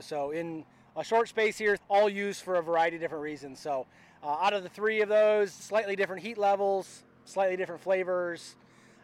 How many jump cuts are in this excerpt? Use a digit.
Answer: 2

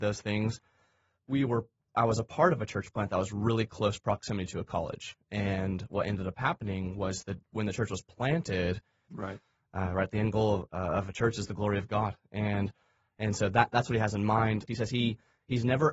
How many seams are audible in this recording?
2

